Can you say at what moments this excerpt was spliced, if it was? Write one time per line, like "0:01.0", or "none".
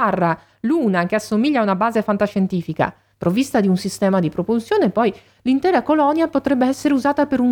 0:03.1